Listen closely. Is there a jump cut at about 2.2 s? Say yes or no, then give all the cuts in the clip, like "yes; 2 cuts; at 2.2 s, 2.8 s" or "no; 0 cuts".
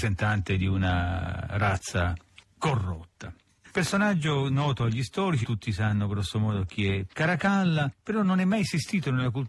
no; 2 cuts; at 3.7 s, 5.4 s